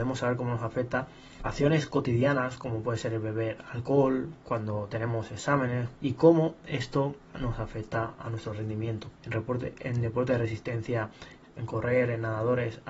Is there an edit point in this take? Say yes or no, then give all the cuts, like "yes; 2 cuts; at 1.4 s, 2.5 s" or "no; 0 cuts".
yes; 2 cuts; at 6.0 s, 9.2 s